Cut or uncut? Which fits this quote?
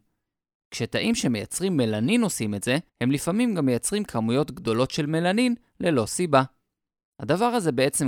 cut